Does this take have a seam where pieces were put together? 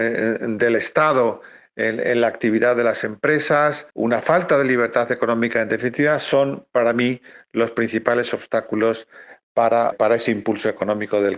yes; 2 cuts; at 3.9 s, 9.9 s

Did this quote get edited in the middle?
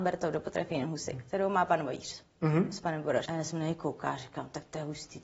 yes; 1 cut; at 3.3 s

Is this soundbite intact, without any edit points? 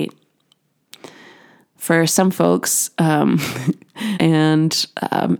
no; 1 cut; at 4.1 s

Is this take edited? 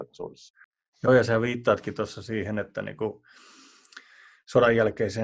no; 0 cuts

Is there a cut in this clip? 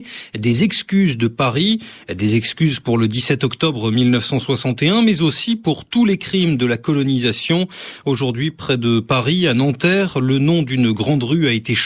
no; 0 cuts

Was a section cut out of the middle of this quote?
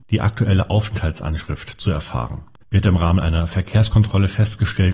yes; 1 cut; at 2.6 s

